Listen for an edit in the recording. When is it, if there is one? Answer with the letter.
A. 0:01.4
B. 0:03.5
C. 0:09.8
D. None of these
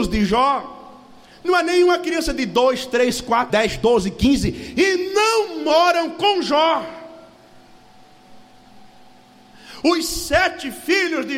B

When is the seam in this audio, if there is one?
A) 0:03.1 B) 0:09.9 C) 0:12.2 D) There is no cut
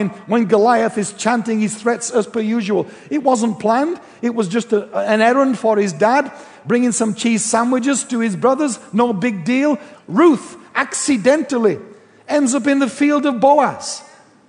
B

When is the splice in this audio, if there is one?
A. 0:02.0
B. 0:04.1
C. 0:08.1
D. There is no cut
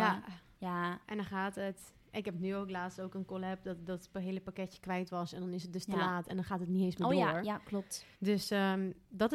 C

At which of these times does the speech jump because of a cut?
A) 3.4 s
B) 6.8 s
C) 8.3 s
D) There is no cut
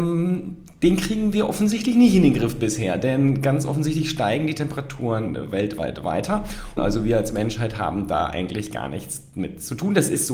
B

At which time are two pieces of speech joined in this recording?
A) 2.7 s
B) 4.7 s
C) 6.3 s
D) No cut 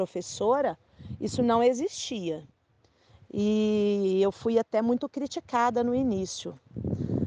D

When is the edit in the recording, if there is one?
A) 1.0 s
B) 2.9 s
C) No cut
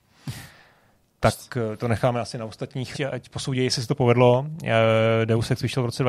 B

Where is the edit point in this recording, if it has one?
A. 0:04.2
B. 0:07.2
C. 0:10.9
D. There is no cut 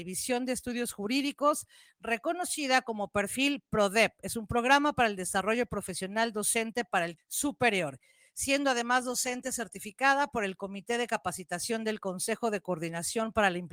B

